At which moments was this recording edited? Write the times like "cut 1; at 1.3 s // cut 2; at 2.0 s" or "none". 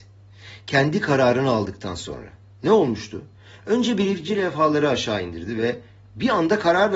none